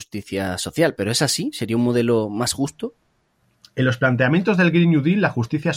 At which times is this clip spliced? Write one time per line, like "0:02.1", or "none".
none